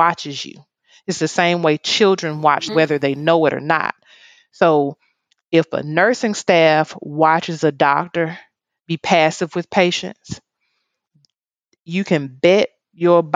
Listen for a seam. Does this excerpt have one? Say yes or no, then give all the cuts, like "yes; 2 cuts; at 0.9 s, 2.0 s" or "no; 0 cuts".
yes; 1 cut; at 2.7 s